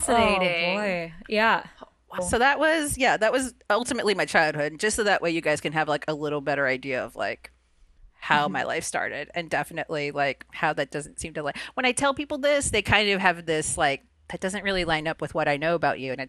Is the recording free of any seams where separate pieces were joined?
no; 1 cut; at 2.2 s

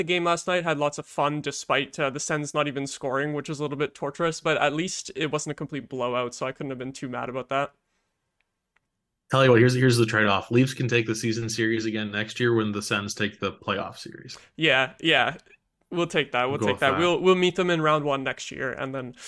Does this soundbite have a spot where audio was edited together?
no; 0 cuts

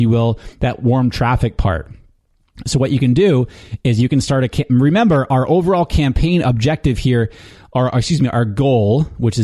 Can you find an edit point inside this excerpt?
no; 0 cuts

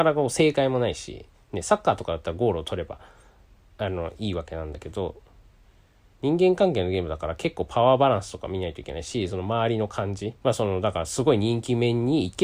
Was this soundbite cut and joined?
yes; 1 cut; at 10.4 s

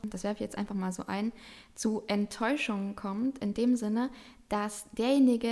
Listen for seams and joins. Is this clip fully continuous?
yes; 0 cuts

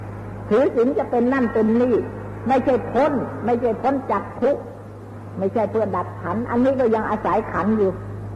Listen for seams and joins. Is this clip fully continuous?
yes; 0 cuts

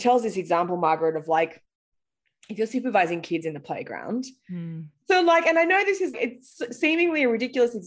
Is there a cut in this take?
yes; 2 cuts; at 4.9 s, 6.1 s

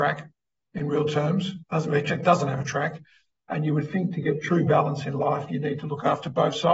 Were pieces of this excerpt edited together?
no; 0 cuts

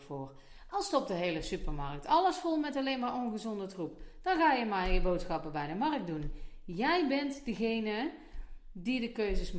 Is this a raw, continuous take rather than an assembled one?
yes; 0 cuts

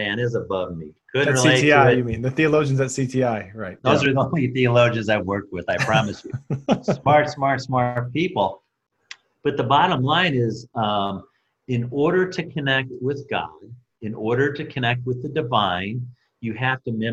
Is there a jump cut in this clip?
yes; 1 cut; at 3.8 s

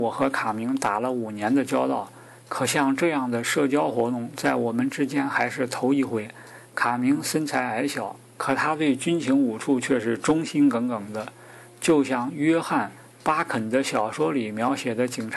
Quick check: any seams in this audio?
yes; 1 cut; at 8.3 s

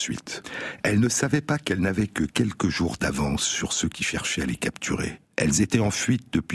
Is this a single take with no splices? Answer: no; 1 cut; at 5.2 s

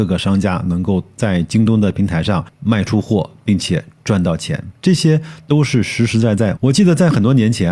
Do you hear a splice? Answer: yes; 1 cut; at 6.6 s

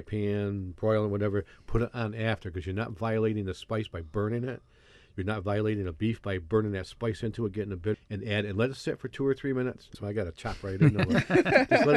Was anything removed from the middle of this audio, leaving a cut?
yes; 2 cuts; at 7.9 s, 9.9 s

